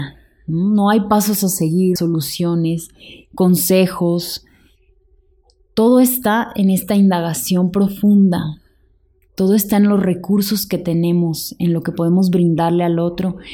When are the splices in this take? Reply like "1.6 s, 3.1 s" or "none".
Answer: 2.0 s